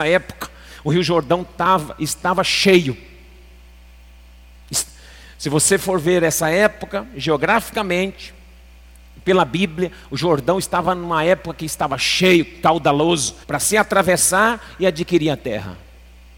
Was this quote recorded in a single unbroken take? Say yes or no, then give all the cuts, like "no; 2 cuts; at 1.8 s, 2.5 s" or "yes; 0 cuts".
no; 1 cut; at 13.4 s